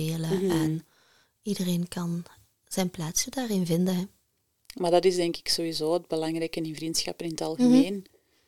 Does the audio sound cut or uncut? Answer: uncut